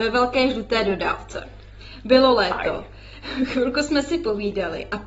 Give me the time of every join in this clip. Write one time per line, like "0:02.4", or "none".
none